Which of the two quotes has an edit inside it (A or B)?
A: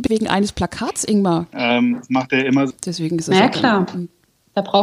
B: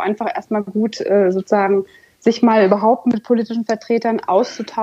A